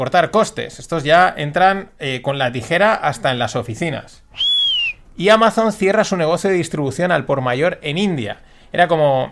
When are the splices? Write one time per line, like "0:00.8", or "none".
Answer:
none